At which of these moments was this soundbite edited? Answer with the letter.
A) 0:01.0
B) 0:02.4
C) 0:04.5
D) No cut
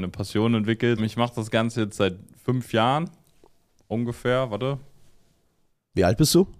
A